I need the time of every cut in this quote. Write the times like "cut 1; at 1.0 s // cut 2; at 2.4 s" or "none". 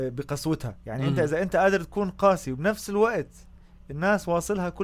none